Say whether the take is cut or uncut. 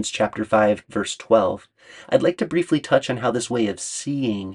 uncut